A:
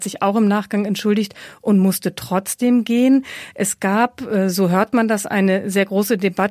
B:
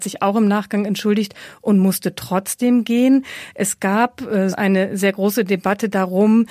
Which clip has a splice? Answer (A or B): B